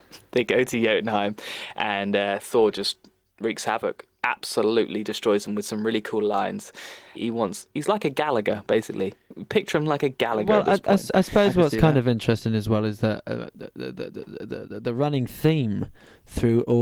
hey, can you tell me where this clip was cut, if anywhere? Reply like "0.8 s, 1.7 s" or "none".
7.1 s